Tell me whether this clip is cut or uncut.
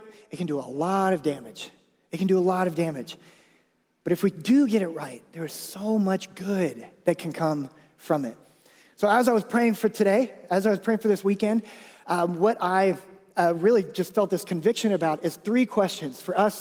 uncut